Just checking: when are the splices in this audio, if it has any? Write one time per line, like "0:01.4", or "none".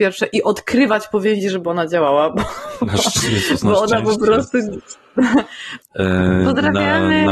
0:05.8